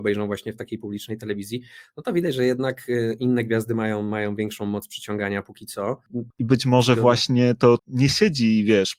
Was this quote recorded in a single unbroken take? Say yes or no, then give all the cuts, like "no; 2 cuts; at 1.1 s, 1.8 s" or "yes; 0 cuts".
no; 2 cuts; at 6.3 s, 7.8 s